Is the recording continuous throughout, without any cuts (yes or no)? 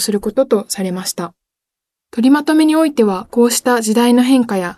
no